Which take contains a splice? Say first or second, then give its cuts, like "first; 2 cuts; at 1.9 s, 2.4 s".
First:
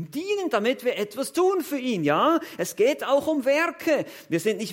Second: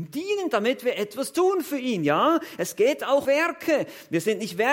second; 1 cut; at 3.2 s